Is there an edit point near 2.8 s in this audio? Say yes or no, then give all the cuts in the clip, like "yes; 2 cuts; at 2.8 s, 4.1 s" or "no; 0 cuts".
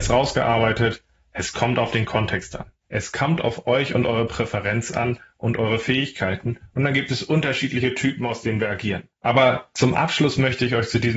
yes; 2 cuts; at 2.8 s, 9.1 s